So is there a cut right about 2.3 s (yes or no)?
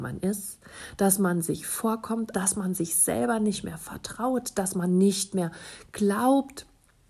yes